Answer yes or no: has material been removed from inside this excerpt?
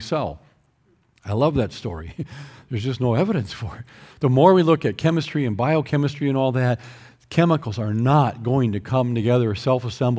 no